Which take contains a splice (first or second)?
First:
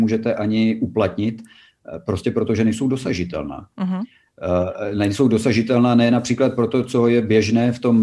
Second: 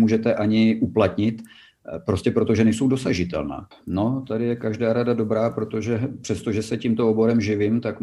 second